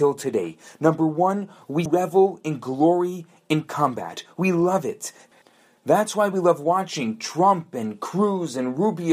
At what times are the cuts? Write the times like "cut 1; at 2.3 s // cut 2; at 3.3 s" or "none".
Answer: cut 1; at 1.9 s